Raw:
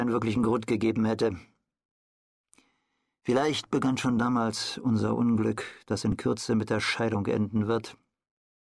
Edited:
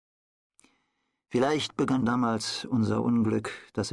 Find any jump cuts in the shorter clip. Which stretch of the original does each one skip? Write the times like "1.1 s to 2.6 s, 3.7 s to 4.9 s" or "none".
4.0 s to 4.2 s